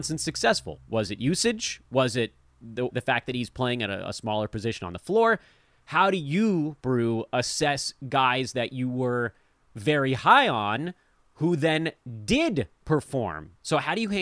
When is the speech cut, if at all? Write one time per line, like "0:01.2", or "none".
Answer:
0:02.9